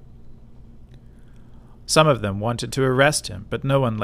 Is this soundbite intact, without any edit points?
no; 1 cut; at 1.8 s

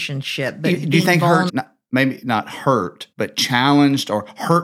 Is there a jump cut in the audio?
yes; 2 cuts; at 1.5 s, 3.1 s

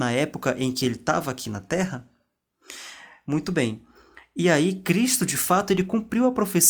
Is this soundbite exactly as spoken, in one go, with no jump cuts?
yes; 0 cuts

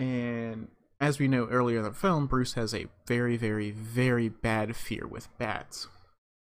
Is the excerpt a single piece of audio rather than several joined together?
yes; 0 cuts

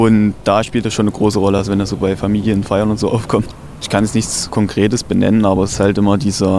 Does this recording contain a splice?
no; 0 cuts

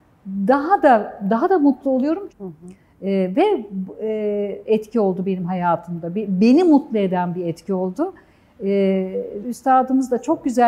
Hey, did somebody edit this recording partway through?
yes; 3 cuts; at 2.3 s, 4.6 s, 9.4 s

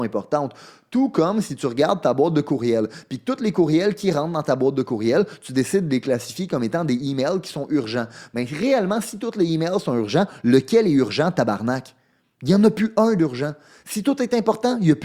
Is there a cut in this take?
no; 0 cuts

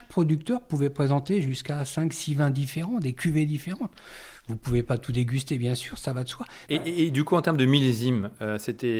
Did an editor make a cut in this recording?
yes; 1 cut; at 6.7 s

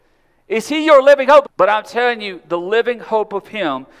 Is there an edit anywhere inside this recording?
yes; 1 cut; at 1.4 s

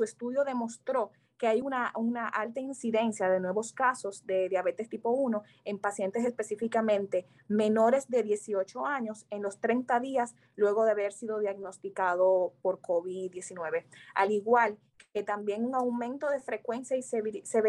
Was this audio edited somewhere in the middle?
no; 0 cuts

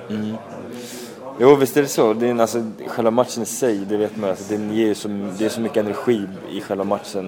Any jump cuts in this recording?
yes; 1 cut; at 3.9 s

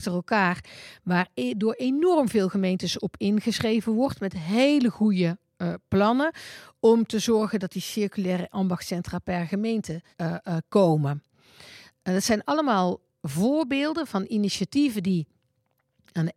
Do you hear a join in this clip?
yes; 1 cut; at 10.1 s

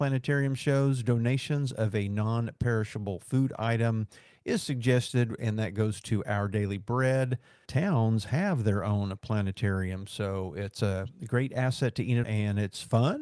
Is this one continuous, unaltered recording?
no; 2 cuts; at 7.7 s, 12.2 s

